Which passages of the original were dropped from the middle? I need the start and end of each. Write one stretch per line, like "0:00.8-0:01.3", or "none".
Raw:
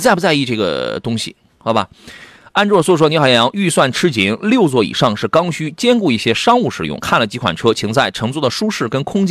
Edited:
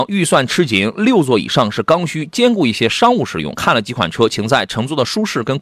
none